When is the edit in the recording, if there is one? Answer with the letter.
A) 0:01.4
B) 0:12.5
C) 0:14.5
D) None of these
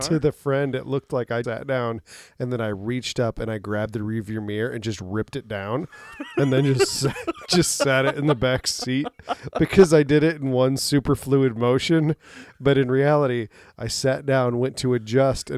A